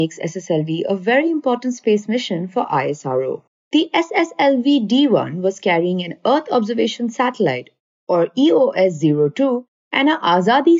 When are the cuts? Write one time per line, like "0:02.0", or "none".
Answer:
0:03.6